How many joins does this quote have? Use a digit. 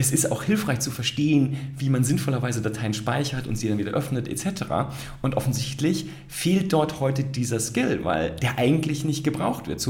0